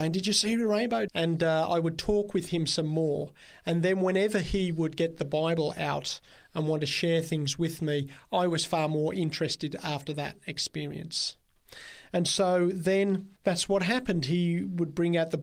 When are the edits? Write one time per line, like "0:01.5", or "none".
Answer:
0:01.1
0:13.4